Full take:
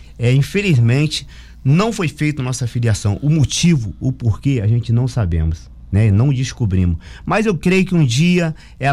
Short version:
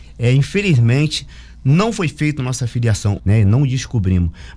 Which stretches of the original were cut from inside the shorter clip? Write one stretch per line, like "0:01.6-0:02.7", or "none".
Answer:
0:03.2-0:05.9